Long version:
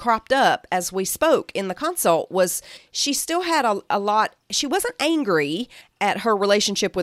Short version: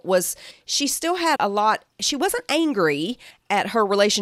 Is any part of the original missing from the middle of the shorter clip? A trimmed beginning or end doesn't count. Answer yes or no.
yes